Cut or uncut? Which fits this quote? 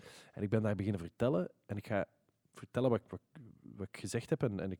uncut